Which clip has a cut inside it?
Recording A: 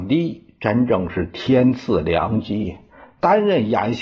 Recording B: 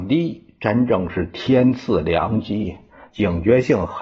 B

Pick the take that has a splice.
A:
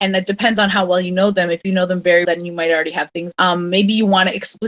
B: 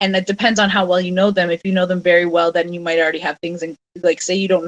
A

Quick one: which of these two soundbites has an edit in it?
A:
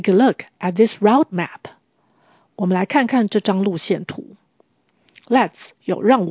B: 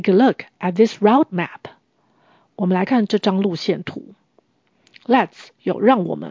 B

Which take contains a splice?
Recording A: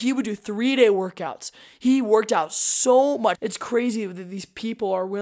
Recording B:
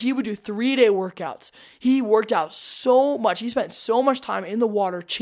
A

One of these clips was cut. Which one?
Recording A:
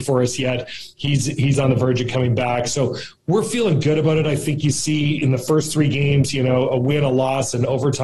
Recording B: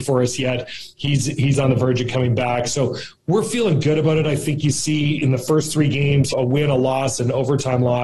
B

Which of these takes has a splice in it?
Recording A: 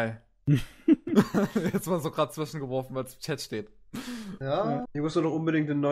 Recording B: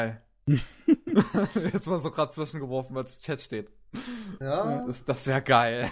A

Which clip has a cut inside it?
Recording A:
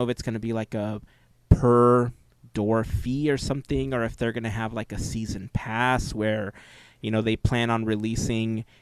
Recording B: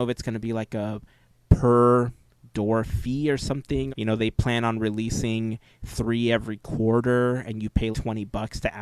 B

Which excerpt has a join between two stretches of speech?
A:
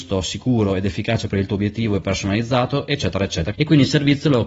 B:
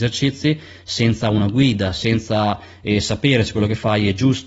A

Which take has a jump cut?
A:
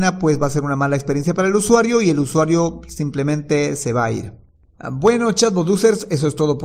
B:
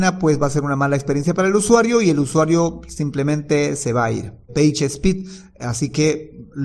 B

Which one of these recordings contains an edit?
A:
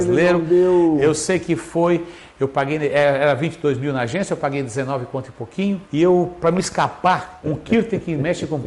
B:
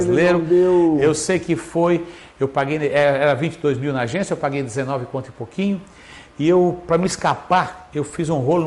A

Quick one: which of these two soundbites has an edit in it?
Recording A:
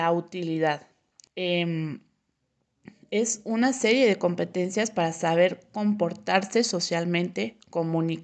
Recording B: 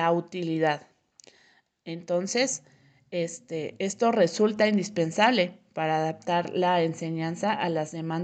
A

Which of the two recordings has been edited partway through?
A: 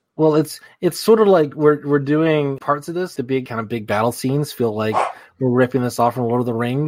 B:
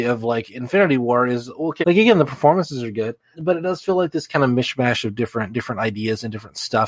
B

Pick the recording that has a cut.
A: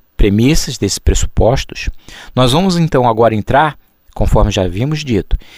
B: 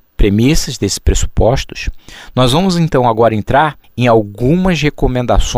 B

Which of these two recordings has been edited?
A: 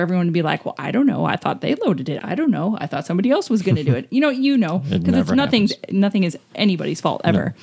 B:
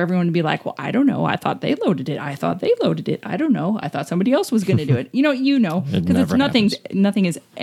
A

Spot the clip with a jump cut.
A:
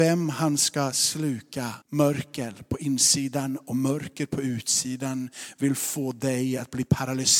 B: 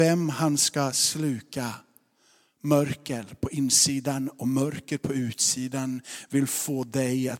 A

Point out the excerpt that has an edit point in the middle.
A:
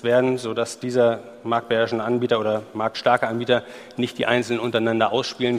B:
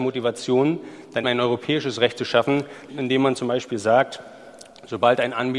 B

